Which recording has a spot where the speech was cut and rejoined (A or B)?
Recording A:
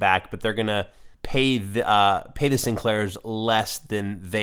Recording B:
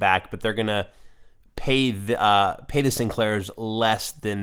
A